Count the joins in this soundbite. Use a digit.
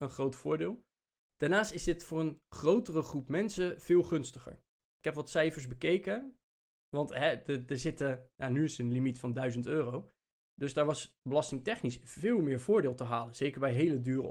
1